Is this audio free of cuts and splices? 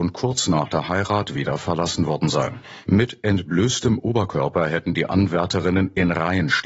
no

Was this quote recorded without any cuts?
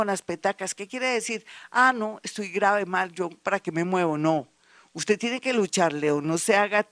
yes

